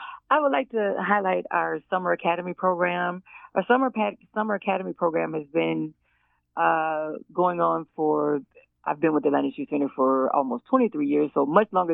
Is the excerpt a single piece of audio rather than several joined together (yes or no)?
yes